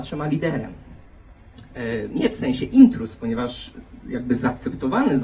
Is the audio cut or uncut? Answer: cut